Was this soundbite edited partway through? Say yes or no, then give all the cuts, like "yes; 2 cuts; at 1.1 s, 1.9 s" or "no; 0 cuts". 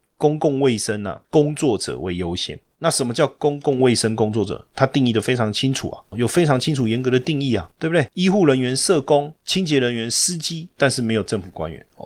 no; 0 cuts